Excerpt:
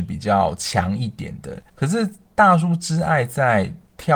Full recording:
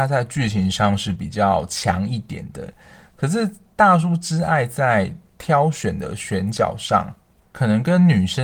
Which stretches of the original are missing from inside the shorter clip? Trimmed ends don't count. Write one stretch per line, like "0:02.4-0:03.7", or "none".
0:02.8-0:03.1